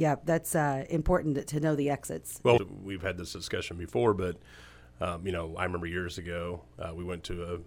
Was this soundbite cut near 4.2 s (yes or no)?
no